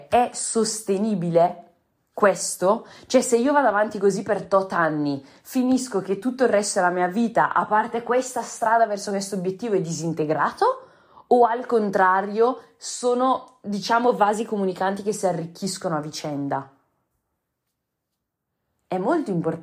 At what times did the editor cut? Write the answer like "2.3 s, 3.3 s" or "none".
none